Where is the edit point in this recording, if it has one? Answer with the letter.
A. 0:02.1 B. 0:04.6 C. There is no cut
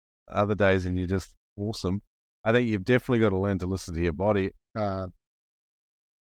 B